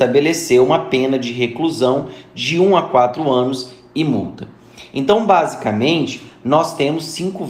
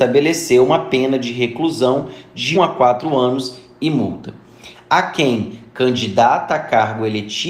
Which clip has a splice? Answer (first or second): second